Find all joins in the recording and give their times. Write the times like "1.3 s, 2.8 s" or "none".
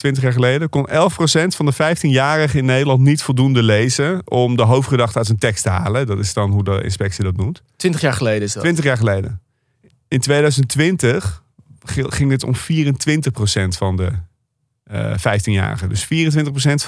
none